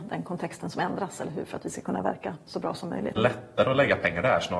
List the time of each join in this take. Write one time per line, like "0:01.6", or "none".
0:03.2

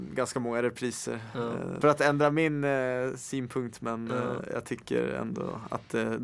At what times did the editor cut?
0:01.8

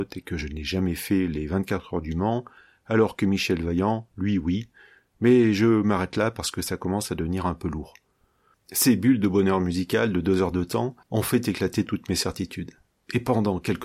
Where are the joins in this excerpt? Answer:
0:08.5
0:11.0

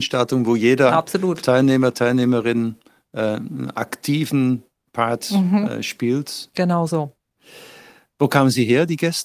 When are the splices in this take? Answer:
none

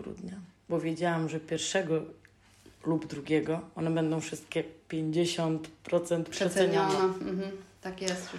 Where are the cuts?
none

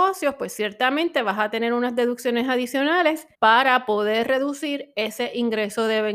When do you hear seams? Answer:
0:03.3

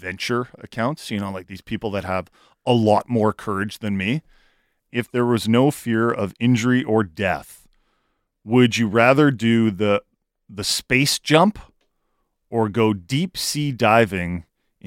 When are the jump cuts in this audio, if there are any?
0:04.9

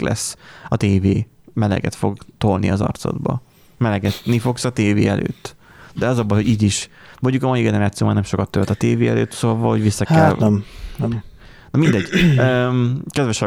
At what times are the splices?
none

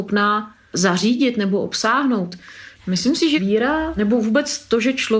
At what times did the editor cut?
0:02.8

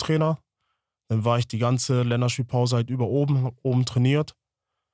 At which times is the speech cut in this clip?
none

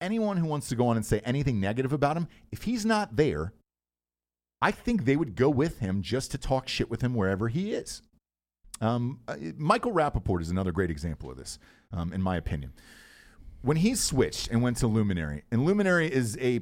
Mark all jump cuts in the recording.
none

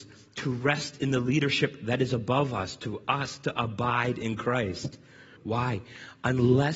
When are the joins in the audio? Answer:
0:05.4

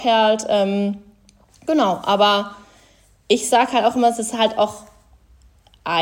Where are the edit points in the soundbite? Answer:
none

